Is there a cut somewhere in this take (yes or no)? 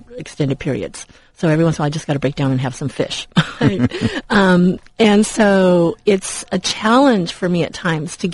yes